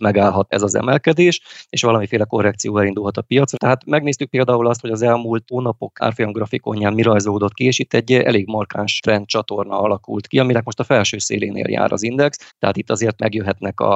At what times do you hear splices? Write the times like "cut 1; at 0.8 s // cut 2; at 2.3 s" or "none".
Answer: cut 1; at 3.5 s // cut 2; at 12.5 s